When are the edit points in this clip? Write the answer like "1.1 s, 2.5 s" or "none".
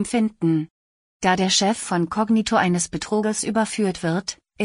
1.0 s